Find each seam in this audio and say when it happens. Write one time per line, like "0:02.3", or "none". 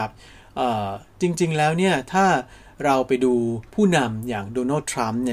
0:03.7